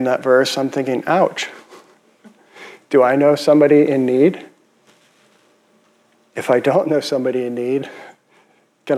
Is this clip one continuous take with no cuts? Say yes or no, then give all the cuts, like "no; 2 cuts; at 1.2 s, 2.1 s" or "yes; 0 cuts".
yes; 0 cuts